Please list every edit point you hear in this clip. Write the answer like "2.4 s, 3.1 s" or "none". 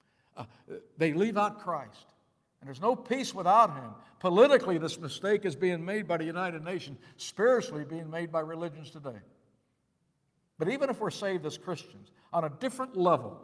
none